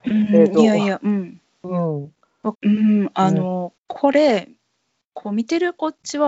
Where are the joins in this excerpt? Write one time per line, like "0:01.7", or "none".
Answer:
0:02.5
0:03.8